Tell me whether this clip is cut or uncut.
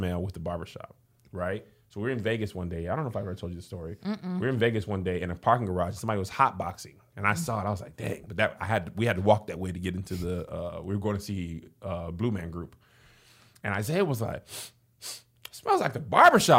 uncut